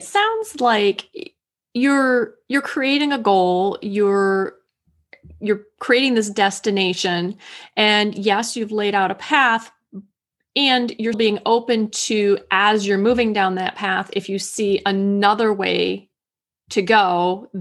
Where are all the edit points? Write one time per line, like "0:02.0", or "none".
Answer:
0:11.1